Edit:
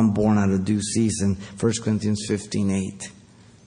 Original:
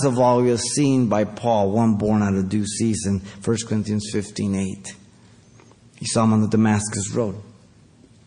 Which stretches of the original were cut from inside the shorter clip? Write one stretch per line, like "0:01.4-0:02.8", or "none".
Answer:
none